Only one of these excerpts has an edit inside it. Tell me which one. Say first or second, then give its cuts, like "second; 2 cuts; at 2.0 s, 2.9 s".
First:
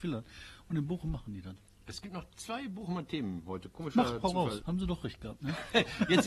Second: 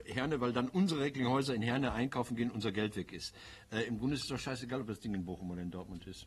first; 1 cut; at 4.6 s